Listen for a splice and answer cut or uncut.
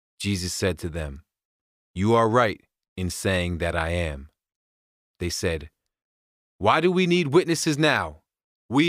uncut